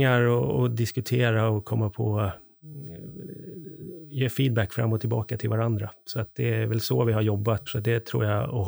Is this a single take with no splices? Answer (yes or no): no